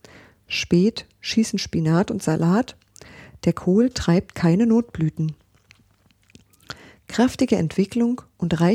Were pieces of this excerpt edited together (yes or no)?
no